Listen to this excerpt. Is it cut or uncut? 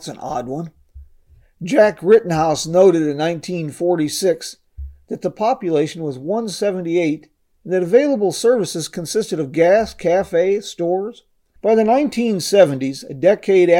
cut